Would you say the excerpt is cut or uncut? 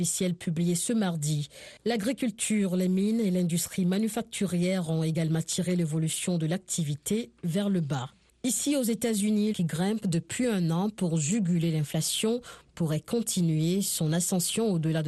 cut